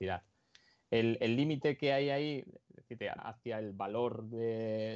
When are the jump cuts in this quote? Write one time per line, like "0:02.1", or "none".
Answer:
0:03.2